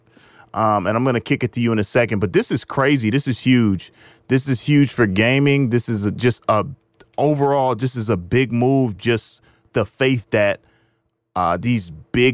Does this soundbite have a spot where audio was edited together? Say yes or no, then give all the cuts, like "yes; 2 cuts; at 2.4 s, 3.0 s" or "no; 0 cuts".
no; 0 cuts